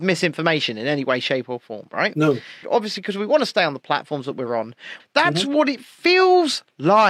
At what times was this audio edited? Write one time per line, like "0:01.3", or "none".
0:02.6
0:05.0